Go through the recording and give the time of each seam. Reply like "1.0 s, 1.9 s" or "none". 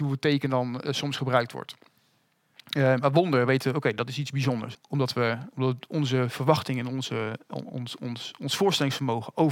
4.7 s